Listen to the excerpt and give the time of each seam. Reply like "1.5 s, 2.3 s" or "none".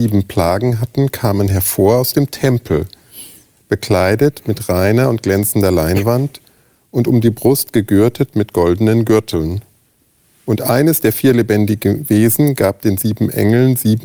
none